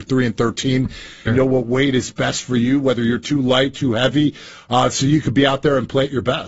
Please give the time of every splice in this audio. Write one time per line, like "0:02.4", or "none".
0:01.3